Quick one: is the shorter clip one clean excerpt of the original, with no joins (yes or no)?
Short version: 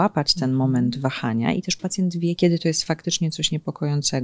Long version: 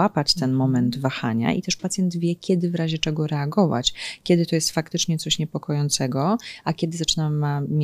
no